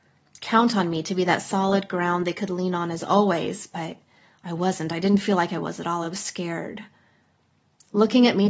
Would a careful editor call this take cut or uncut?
uncut